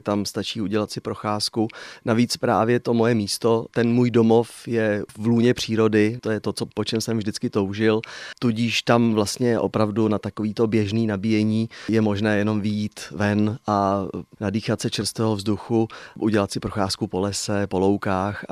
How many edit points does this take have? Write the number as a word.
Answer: one